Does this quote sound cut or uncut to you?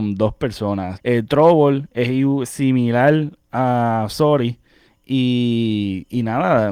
cut